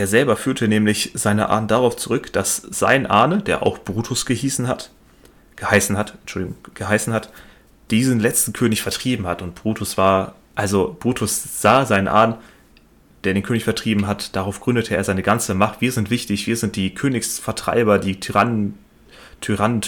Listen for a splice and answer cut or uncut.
uncut